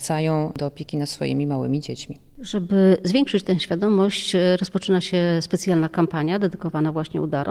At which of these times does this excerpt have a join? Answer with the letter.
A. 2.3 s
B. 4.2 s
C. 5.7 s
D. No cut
D